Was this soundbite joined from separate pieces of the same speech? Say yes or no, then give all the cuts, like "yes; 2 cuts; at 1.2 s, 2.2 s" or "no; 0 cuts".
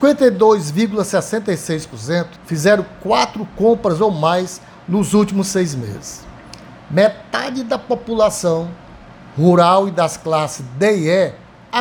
yes; 2 cuts; at 2.4 s, 6.8 s